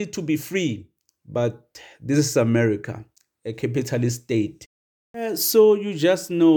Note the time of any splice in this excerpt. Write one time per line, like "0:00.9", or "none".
none